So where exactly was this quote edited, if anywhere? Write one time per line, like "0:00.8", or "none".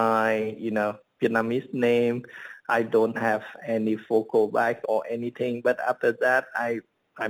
0:02.7
0:04.8